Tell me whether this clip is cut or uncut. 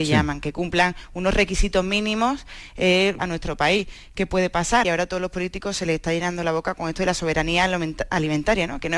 cut